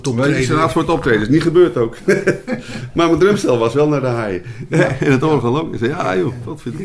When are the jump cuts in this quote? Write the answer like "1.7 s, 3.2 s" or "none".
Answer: none